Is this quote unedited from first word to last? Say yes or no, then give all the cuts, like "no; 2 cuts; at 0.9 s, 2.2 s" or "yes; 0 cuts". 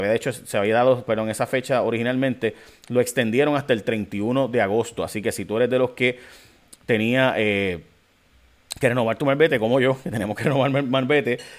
yes; 0 cuts